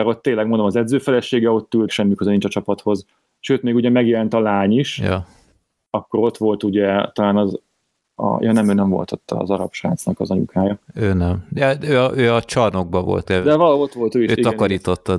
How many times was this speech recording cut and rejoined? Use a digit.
2